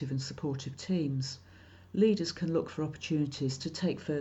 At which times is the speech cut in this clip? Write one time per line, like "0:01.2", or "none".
none